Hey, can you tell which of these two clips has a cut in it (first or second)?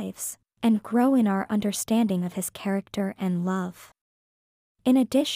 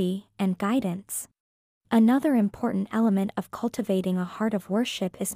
second